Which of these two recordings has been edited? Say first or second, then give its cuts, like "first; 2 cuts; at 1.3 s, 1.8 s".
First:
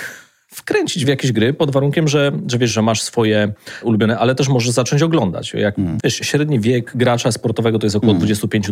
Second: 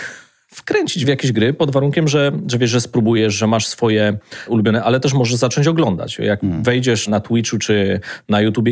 first; 2 cuts; at 2.7 s, 6.0 s